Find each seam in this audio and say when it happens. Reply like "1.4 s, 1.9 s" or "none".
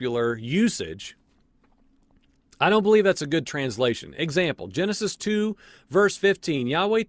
none